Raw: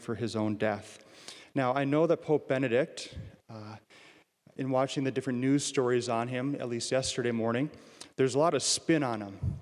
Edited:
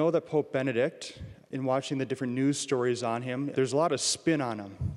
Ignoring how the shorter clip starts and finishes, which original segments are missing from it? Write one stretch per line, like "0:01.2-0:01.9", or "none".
0:03.3-0:04.4
0:06.6-0:08.1